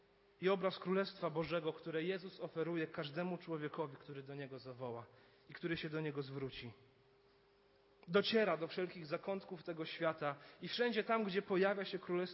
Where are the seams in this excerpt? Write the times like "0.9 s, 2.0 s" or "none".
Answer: none